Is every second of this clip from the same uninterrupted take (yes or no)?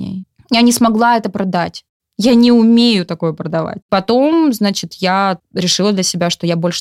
no